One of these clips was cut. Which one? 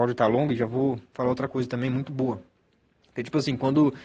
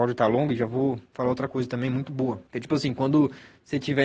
second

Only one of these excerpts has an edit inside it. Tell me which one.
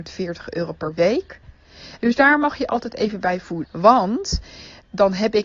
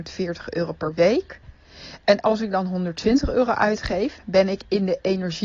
first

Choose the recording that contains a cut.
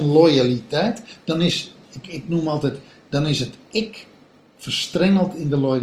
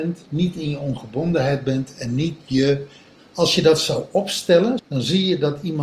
second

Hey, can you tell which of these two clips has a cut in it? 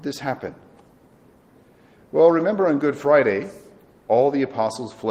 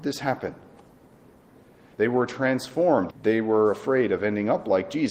second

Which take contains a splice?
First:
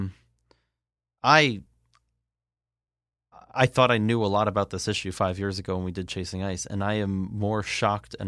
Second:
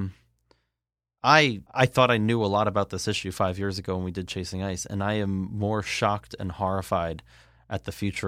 second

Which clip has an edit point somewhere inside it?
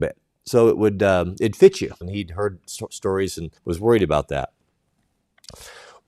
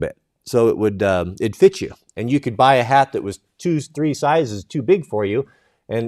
first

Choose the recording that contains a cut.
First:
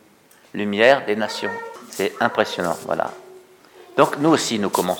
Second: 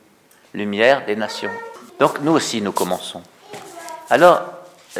second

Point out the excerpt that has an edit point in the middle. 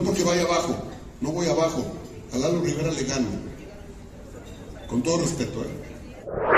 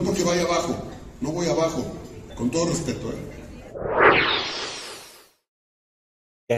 second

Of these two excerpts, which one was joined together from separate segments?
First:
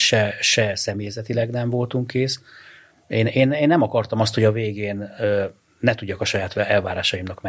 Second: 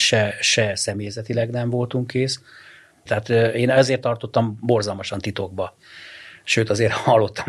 second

